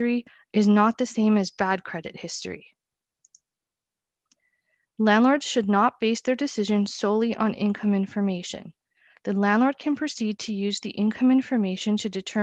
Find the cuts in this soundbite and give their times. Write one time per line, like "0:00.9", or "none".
none

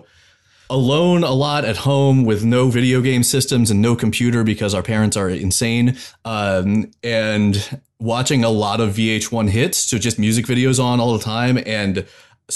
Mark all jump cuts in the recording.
none

